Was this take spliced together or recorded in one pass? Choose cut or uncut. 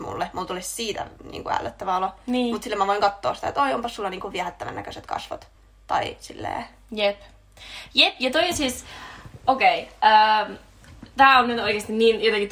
uncut